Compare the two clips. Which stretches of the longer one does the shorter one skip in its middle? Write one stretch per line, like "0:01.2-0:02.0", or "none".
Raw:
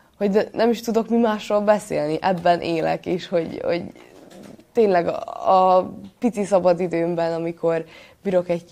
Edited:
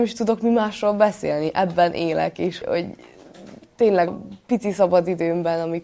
0:03.3-0:03.6
0:05.0-0:05.8